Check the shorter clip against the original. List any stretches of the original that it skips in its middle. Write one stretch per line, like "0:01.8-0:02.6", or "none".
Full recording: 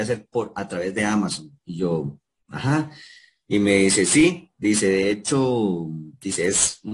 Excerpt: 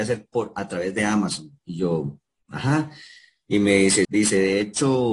0:04.0-0:04.6